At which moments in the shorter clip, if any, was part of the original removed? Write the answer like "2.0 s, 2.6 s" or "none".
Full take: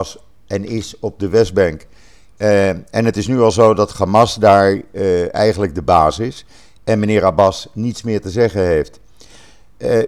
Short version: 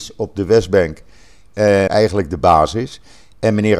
1.9 s